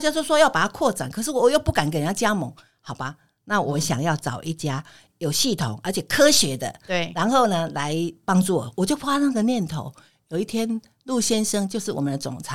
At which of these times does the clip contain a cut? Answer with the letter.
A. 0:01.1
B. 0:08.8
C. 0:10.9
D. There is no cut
D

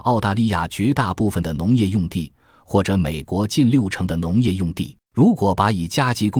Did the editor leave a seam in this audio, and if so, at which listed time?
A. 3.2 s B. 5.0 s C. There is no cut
B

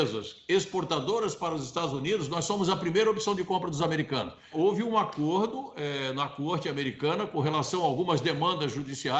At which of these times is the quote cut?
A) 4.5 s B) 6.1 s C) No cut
A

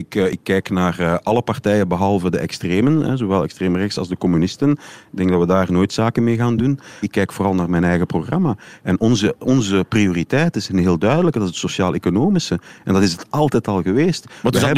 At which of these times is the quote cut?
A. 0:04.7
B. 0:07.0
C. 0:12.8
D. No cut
B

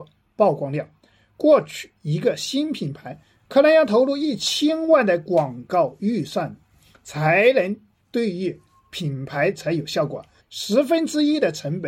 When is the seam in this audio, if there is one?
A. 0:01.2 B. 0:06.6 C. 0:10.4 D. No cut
C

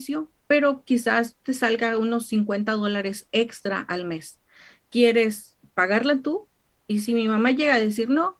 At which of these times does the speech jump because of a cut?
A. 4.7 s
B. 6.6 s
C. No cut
C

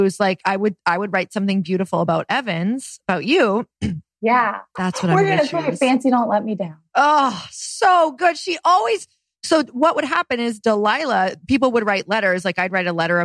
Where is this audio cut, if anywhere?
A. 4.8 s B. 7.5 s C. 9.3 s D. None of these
A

